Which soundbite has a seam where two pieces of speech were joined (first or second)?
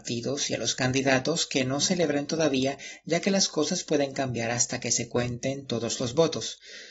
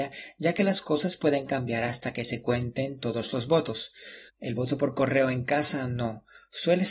second